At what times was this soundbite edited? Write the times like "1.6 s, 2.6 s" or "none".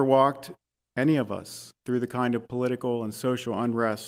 1.8 s